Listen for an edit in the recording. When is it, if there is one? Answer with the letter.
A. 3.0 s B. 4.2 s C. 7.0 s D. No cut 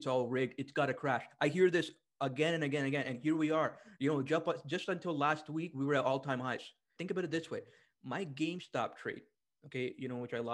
C